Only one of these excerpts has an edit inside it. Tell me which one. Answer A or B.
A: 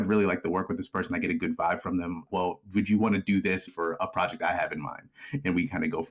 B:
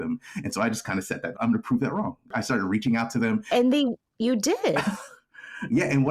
A